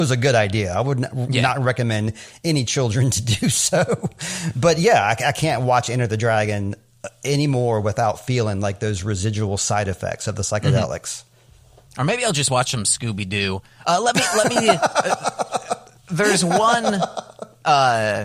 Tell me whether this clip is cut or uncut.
uncut